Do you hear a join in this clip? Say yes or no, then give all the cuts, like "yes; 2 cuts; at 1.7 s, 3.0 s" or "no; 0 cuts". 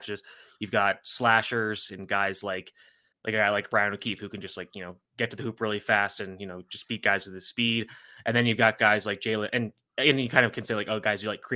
yes; 1 cut; at 3.1 s